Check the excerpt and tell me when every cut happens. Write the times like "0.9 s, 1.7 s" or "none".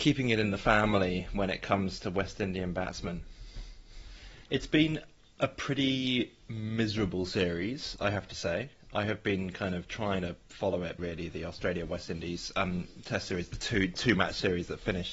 4.5 s, 11.0 s